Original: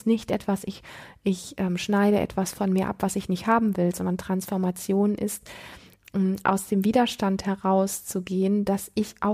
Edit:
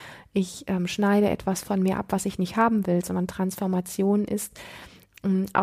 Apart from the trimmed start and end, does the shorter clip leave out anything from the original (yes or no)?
no